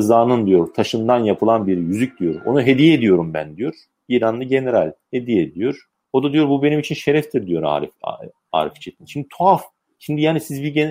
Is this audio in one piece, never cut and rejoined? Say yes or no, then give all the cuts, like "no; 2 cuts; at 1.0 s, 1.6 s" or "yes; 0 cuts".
yes; 0 cuts